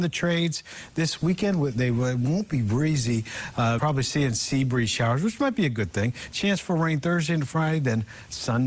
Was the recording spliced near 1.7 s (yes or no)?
no